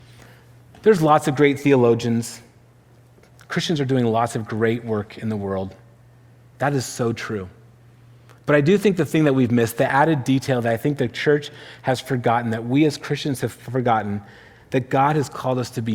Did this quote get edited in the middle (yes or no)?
no